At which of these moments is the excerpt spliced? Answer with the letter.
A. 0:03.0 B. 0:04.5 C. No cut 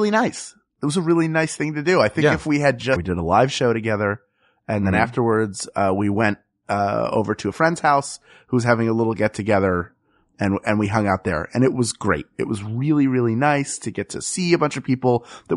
A